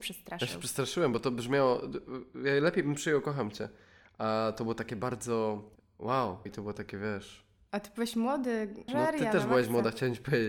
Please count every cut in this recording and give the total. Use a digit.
2